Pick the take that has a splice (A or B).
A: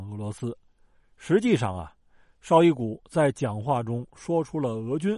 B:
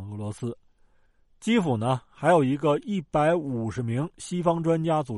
A